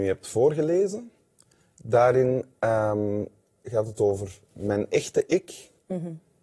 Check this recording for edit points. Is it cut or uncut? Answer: uncut